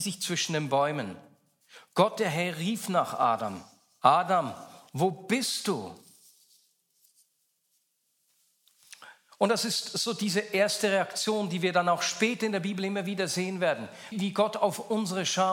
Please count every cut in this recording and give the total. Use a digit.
1